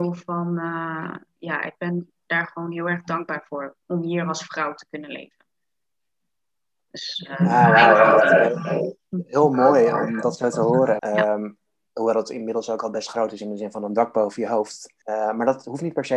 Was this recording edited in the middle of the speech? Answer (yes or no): yes